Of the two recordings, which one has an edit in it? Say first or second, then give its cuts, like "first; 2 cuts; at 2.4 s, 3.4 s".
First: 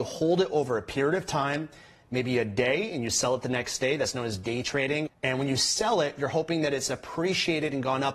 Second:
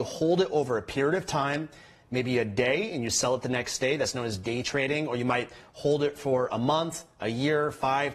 first; 1 cut; at 5.1 s